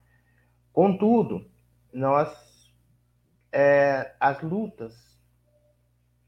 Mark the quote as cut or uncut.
cut